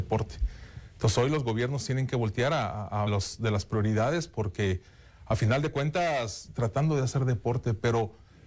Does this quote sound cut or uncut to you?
cut